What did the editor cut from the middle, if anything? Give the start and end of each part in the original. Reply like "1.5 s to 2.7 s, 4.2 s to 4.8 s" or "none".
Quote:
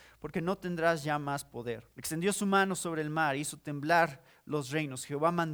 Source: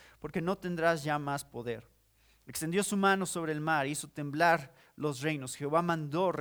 1.9 s to 2.4 s